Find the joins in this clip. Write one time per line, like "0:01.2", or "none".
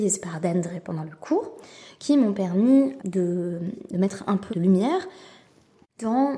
0:03.0
0:04.5